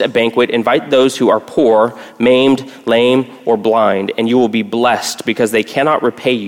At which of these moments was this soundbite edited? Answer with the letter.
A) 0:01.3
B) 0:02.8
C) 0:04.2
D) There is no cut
D